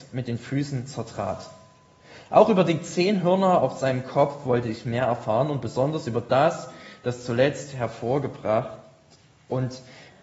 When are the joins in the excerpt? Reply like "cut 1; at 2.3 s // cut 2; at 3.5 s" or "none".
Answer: none